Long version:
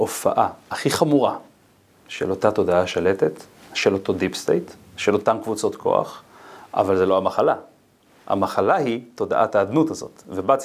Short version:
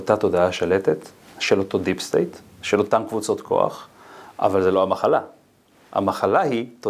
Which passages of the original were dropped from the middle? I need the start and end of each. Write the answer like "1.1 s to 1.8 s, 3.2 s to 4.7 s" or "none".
none

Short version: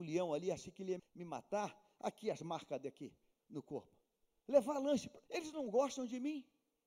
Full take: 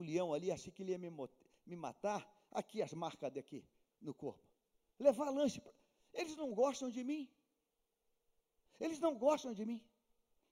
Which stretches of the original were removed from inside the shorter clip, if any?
1.0 s to 1.5 s, 5.8 s to 6.1 s

